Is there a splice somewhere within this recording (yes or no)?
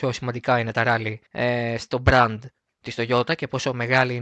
yes